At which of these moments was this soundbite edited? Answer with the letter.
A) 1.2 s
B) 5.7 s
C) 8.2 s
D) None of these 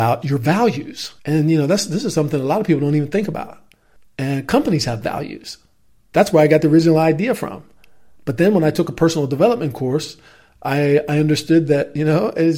A